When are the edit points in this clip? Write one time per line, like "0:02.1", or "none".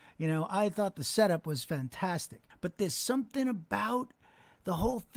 0:02.5